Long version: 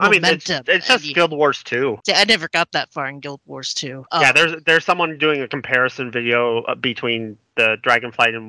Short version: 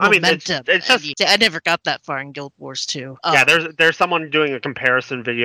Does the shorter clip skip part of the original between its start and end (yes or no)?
yes